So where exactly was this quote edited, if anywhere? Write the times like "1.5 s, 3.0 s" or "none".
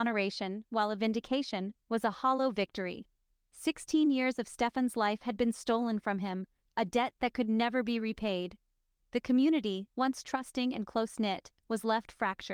none